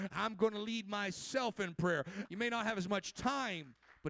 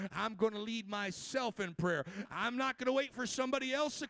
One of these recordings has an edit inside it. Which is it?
first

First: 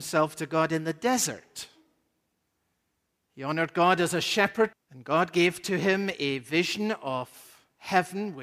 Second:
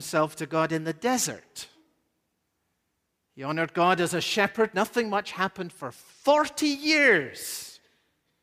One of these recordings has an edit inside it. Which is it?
first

